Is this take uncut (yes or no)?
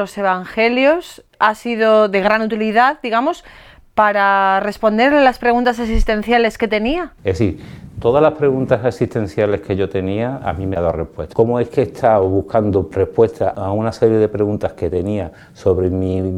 no